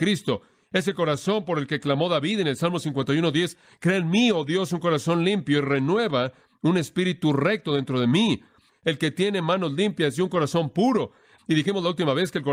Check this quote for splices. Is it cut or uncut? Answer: cut